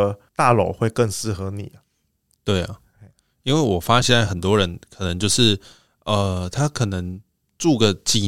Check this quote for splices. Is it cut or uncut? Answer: cut